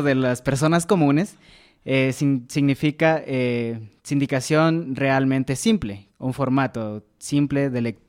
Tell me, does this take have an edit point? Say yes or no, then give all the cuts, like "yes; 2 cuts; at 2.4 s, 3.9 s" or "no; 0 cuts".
yes; 1 cut; at 6.1 s